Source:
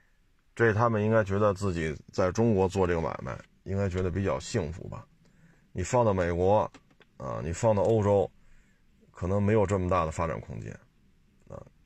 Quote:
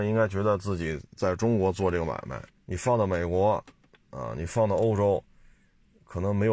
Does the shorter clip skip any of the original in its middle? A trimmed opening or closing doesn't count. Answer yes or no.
yes